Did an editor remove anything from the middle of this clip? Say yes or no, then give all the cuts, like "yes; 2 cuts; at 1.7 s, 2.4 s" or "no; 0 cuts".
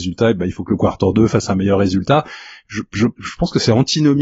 yes; 1 cut; at 3.2 s